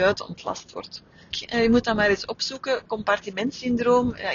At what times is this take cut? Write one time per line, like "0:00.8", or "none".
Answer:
0:01.3